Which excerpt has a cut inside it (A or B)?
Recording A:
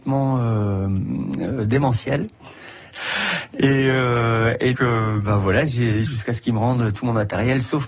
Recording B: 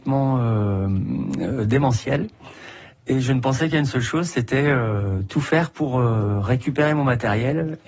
A